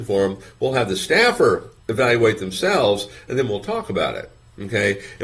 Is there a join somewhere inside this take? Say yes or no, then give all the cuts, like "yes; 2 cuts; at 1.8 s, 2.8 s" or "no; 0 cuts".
yes; 1 cut; at 1.8 s